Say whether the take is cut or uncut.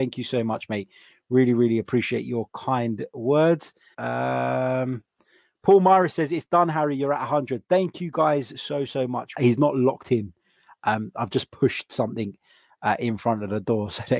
cut